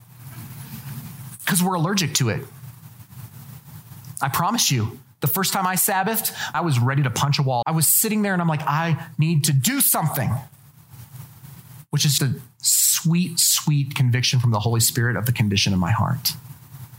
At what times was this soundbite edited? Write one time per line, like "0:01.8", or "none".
0:06.5
0:07.6
0:12.2